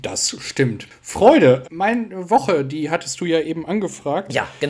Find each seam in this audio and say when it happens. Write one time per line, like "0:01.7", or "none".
0:01.6